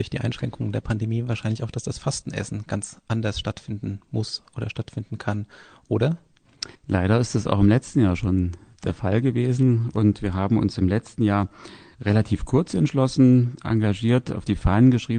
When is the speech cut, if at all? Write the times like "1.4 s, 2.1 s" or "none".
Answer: 6.7 s